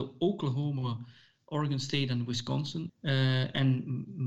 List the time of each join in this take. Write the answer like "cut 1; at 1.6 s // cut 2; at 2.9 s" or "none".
cut 1; at 2.9 s